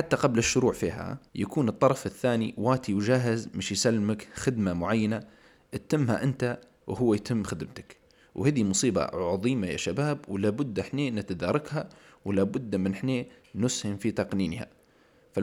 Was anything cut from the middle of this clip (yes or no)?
yes